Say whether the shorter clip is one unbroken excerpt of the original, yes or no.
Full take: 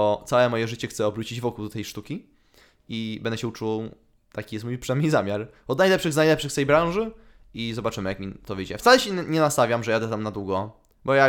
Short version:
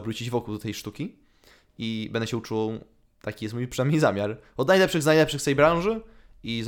yes